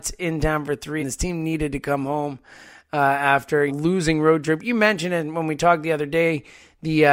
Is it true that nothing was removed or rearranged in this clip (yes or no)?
no